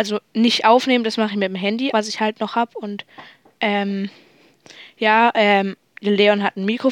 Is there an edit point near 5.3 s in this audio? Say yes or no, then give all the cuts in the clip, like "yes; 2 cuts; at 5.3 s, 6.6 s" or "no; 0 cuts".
no; 1 cut; at 1.9 s